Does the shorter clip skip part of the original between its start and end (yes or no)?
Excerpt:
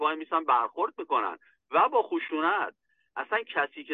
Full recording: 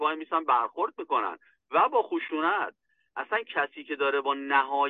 no